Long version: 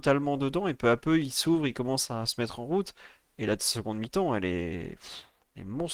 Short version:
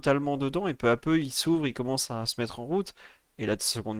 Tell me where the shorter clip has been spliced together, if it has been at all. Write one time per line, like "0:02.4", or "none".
none